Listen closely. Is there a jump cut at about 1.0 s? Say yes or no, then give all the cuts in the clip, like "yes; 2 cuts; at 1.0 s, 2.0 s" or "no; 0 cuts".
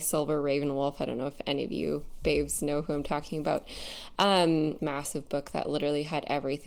no; 1 cut; at 4.8 s